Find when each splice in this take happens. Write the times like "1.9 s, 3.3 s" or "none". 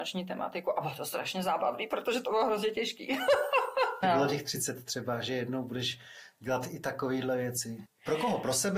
4.0 s, 7.9 s